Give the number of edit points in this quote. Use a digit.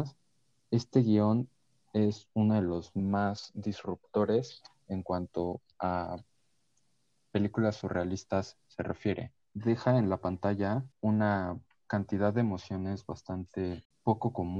2